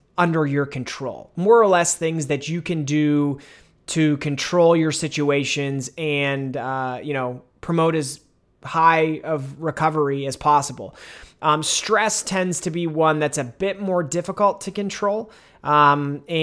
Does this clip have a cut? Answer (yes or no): no